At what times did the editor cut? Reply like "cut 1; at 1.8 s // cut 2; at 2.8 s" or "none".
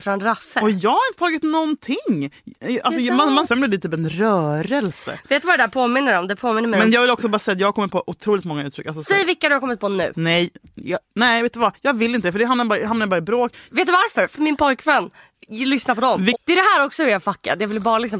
cut 1; at 3.4 s // cut 2; at 13.7 s // cut 3; at 16.3 s